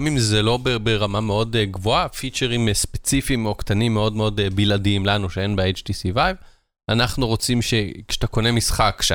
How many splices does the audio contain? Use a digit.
0